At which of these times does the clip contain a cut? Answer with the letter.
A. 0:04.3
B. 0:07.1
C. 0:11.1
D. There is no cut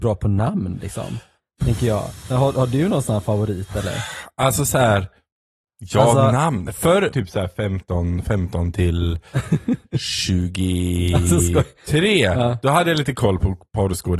B